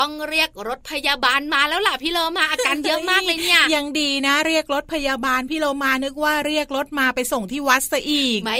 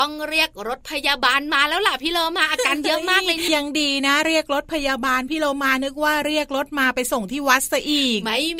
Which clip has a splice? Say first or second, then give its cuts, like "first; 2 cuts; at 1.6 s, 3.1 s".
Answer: second; 1 cut; at 3.5 s